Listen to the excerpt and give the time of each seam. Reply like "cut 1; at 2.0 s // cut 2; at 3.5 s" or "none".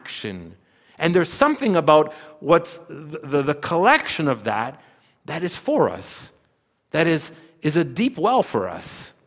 none